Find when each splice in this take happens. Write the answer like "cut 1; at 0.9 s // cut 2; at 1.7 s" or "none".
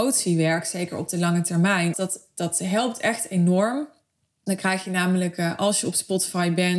cut 1; at 1.9 s

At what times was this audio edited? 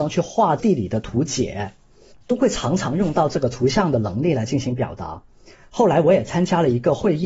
none

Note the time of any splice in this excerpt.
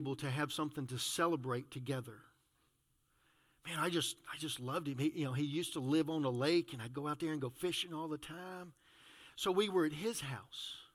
none

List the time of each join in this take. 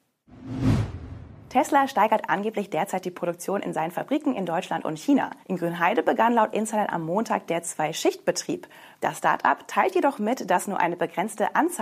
cut 1; at 5.4 s // cut 2; at 8.9 s

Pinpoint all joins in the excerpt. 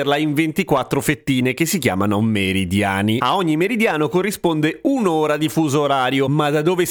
none

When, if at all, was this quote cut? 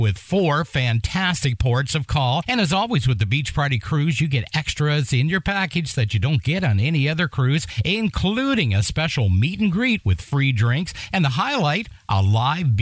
none

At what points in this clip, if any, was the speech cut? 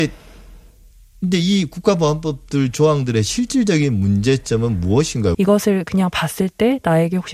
cut 1; at 5.3 s

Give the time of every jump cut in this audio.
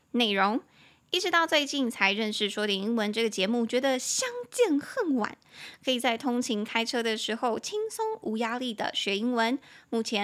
none

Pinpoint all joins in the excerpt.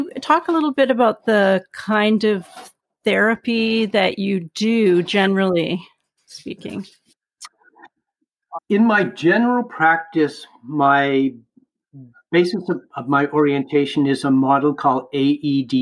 cut 1; at 8.6 s

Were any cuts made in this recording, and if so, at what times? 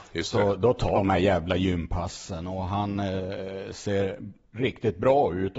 cut 1; at 0.9 s

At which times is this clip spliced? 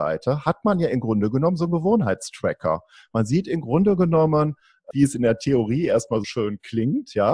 cut 1; at 4.9 s // cut 2; at 6.2 s

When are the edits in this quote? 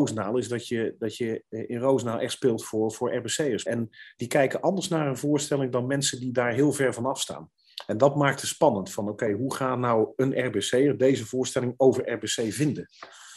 cut 1; at 3.7 s

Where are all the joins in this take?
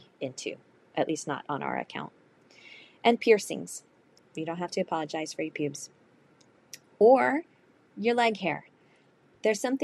cut 1; at 4.2 s

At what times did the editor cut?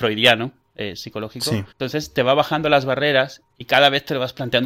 cut 1; at 1.7 s

